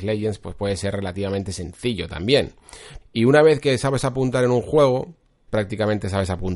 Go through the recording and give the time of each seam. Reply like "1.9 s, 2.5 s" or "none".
3.0 s, 5.5 s